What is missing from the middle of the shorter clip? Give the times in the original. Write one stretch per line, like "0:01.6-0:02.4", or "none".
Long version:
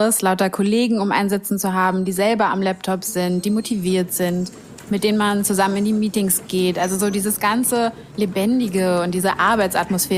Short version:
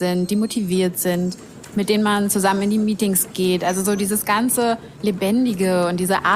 none